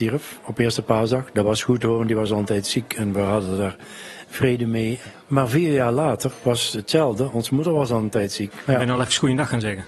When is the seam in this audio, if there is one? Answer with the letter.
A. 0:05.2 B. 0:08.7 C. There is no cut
B